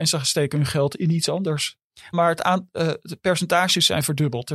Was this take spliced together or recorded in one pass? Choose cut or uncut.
cut